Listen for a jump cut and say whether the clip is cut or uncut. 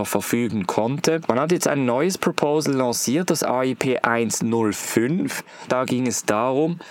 cut